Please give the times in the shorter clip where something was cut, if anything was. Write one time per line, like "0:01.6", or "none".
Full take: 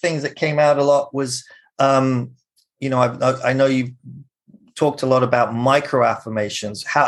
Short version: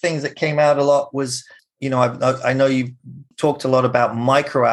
0:01.6
0:03.3